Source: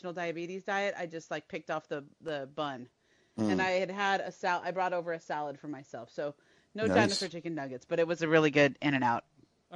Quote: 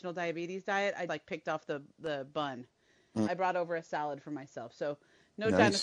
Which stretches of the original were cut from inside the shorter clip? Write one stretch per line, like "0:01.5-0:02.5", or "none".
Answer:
0:01.1-0:01.3
0:03.5-0:04.6